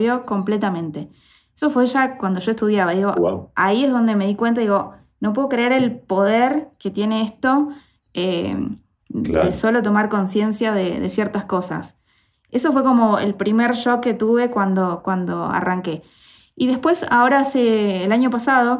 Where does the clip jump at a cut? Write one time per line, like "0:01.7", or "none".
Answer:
none